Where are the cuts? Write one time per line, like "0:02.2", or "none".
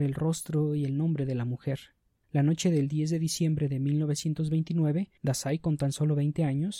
0:02.2
0:05.2